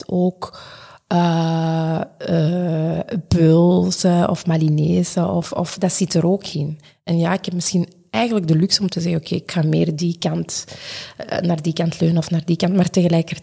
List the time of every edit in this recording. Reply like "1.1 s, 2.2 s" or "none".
none